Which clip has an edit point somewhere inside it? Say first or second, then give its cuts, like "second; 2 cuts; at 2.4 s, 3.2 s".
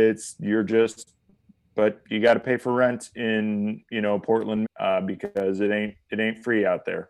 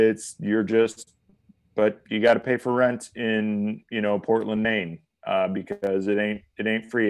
first; 1 cut; at 4.6 s